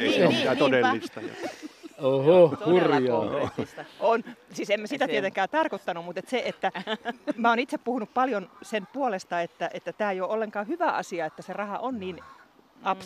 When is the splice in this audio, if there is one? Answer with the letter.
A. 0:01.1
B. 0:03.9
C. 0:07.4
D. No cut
C